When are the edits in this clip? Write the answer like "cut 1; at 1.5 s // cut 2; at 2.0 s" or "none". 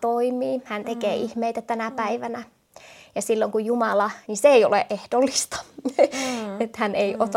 cut 1; at 4.2 s